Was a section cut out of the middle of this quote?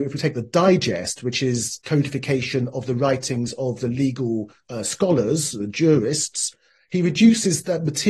no; 0 cuts

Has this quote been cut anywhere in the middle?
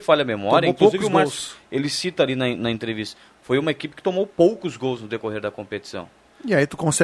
no; 0 cuts

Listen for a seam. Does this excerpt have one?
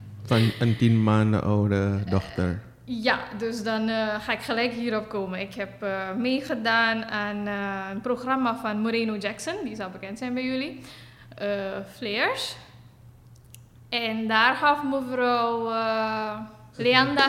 no; 0 cuts

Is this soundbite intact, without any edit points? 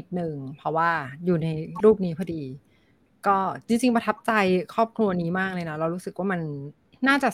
yes; 0 cuts

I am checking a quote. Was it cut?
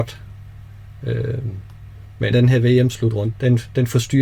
yes; 2 cuts; at 2.3 s, 3.3 s

